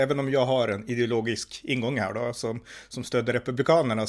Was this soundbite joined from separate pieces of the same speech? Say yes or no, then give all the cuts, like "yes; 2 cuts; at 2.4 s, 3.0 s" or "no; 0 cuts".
no; 0 cuts